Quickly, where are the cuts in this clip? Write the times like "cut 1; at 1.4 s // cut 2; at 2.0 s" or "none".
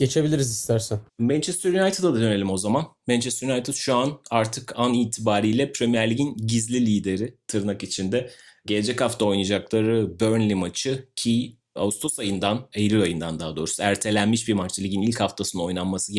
cut 1; at 1.1 s